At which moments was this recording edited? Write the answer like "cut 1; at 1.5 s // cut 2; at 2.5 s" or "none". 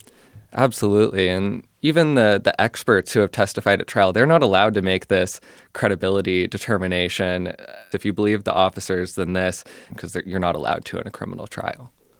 cut 1; at 7.9 s // cut 2; at 9.9 s

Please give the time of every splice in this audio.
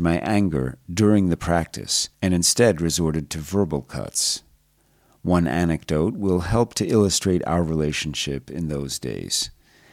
cut 1; at 2.1 s

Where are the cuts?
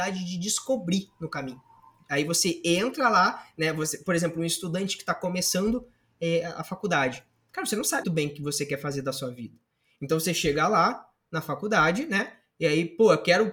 cut 1; at 8.0 s

